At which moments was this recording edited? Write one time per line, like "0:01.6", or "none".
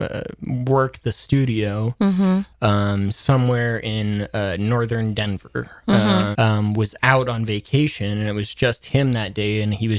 0:02.5
0:06.3

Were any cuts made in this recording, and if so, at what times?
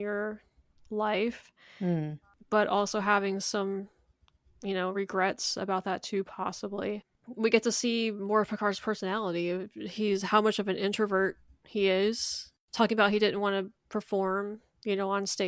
none

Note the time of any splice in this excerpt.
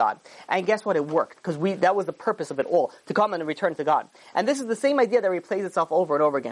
none

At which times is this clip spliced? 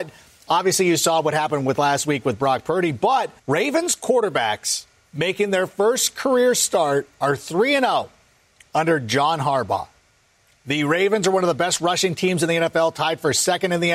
0:03.4

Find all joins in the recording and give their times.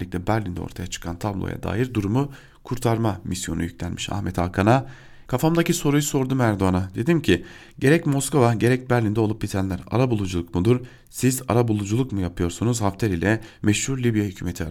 0:05.3

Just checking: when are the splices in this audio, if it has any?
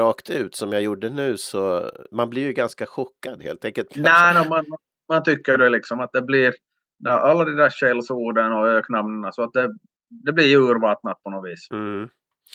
0:03.9

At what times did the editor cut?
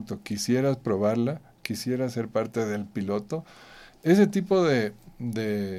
none

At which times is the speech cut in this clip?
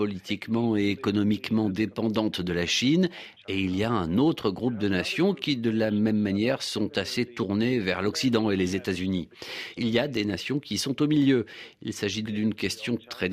0:12.3

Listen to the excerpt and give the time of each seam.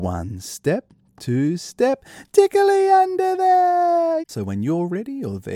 0:04.2

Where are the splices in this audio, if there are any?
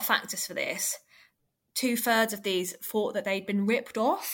none

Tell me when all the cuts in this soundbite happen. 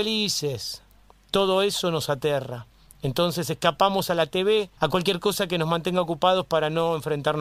0:04.8

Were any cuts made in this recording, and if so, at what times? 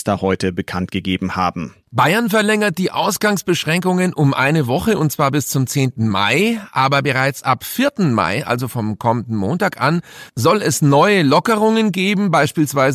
none

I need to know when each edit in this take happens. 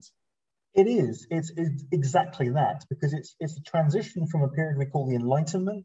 0:01.5

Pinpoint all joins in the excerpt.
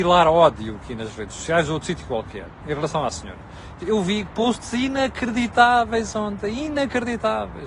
0:03.8

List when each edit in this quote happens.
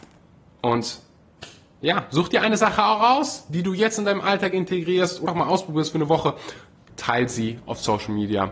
0:05.3
0:06.9

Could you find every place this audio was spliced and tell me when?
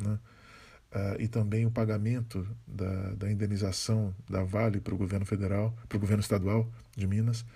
none

